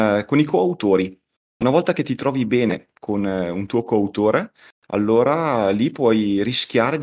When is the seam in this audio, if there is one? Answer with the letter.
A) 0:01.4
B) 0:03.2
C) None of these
C